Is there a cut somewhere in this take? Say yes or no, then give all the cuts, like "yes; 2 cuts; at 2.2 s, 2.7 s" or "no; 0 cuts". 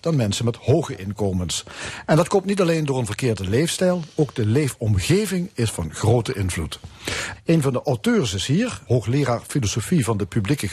yes; 2 cuts; at 7.4 s, 8.9 s